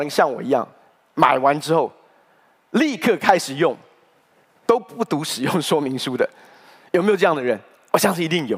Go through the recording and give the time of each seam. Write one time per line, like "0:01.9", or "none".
none